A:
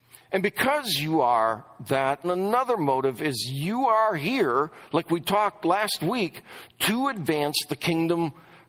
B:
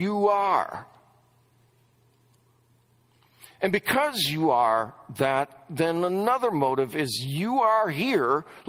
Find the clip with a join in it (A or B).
A